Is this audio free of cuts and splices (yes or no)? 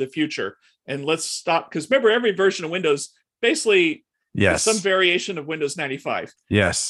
yes